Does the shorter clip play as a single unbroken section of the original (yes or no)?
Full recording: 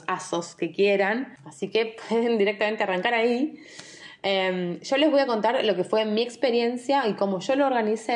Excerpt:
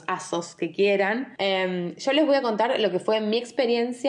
no